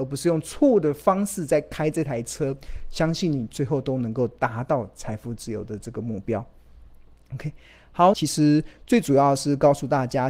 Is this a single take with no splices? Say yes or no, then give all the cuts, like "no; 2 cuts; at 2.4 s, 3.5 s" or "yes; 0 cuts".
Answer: no; 1 cut; at 8.1 s